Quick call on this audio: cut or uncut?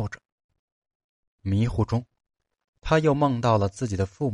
uncut